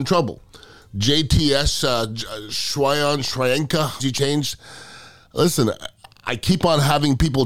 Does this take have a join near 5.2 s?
no; 1 cut; at 4.0 s

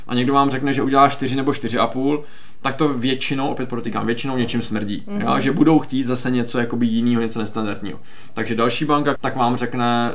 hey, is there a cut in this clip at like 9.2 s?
yes; 1 cut; at 9.2 s

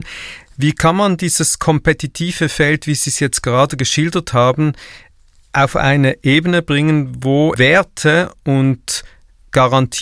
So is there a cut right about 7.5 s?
yes; 1 cut; at 7.5 s

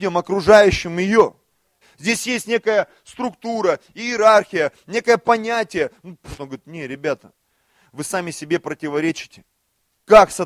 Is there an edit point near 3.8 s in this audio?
no; 2 cuts; at 1.8 s, 6.4 s

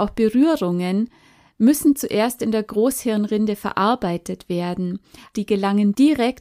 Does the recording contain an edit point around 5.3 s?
yes; 1 cut; at 5.3 s

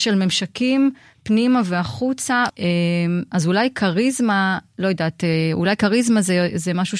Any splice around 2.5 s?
yes; 1 cut; at 2.5 s

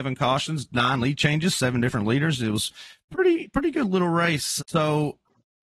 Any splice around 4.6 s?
yes; 1 cut; at 4.6 s

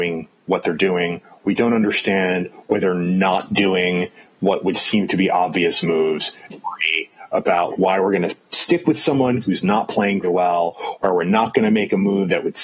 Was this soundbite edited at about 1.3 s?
no; 3 cuts; at 6.5 s, 7.7 s, 10.2 s

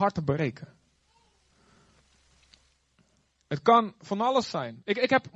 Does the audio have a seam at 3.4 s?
no; 0 cuts

